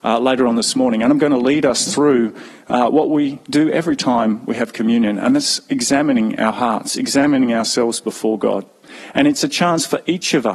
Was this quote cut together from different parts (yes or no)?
no